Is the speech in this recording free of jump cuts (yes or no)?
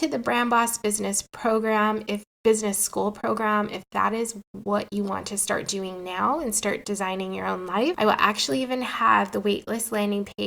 no